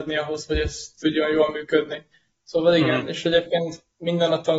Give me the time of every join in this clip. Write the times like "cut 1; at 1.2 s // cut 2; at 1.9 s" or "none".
none